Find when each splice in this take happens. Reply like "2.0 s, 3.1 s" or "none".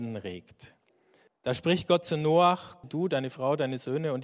1.3 s, 2.8 s